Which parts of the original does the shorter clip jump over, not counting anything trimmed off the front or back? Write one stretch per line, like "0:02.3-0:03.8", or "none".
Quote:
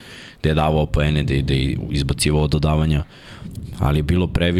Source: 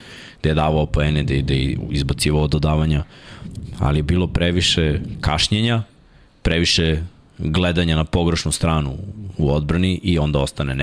none